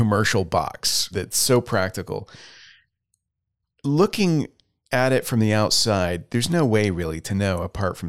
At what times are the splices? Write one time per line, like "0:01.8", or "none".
0:01.1